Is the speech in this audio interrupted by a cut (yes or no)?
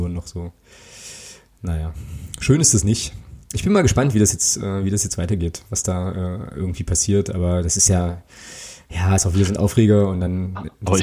no